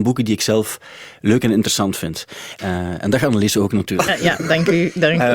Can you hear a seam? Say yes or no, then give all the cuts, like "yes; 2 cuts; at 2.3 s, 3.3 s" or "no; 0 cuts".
yes; 1 cut; at 2.6 s